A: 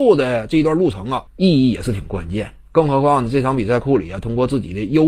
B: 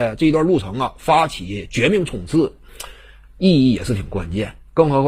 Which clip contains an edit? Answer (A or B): A